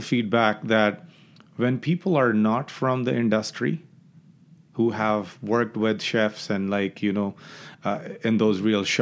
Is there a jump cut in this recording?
no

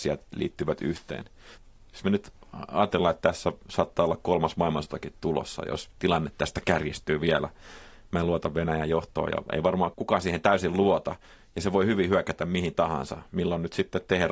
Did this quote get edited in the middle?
no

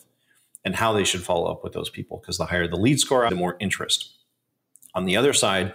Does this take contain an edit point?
yes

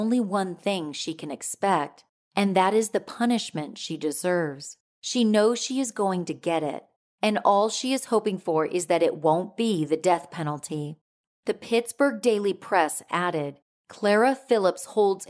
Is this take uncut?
no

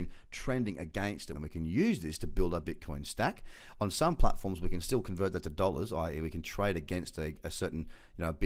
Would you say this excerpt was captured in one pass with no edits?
no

